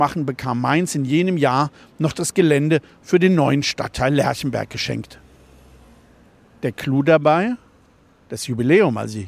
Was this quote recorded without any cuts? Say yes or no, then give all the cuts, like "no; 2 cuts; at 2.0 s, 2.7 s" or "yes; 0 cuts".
yes; 0 cuts